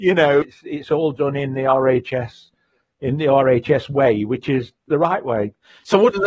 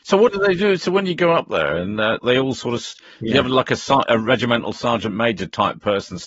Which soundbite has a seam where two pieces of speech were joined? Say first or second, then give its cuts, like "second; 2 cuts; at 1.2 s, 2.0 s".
second; 1 cut; at 2.2 s